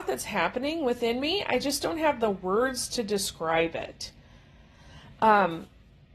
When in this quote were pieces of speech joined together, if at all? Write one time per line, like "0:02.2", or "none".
none